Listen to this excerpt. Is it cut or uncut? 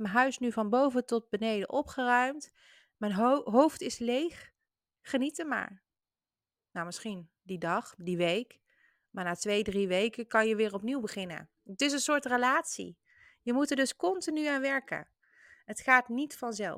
uncut